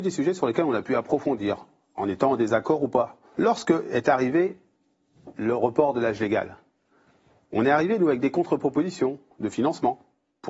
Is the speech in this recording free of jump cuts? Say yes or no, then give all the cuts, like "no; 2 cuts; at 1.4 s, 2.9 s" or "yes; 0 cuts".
no; 1 cut; at 3.3 s